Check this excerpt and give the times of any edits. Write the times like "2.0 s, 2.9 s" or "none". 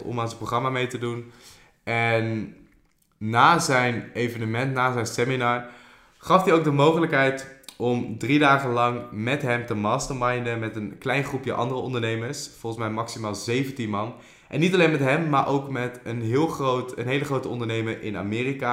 none